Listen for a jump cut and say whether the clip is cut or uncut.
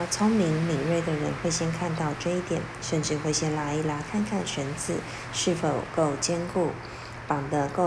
uncut